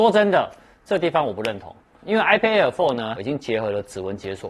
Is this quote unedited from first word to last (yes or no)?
no